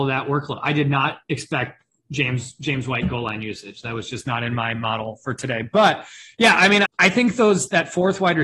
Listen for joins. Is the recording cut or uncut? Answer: cut